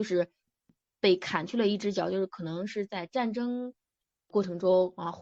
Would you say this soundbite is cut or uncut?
uncut